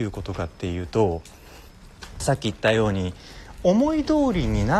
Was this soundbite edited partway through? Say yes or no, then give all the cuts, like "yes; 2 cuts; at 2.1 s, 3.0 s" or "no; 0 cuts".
no; 0 cuts